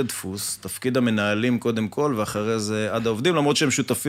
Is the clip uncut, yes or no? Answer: yes